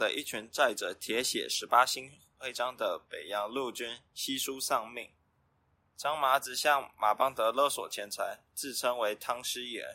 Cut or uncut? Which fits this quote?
cut